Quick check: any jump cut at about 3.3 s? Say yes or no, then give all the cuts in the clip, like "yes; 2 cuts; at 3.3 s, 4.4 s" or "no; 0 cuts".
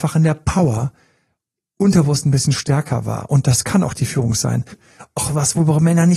no; 1 cut; at 4.7 s